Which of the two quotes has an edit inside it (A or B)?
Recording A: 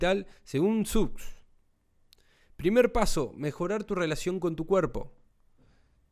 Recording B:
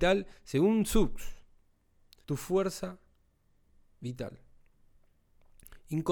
B